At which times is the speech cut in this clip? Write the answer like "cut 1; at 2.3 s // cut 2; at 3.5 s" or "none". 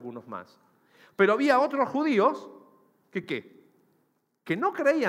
none